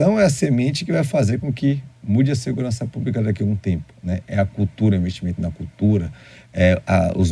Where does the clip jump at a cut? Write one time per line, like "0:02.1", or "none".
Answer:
none